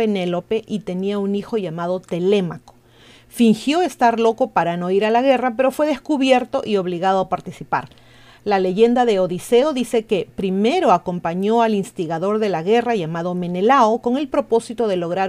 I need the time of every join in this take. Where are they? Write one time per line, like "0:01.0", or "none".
none